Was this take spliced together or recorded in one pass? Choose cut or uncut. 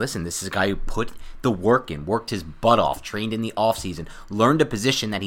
uncut